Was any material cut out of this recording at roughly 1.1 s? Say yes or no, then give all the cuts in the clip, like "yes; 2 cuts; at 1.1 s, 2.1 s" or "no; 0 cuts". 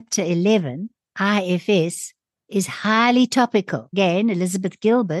yes; 1 cut; at 1.1 s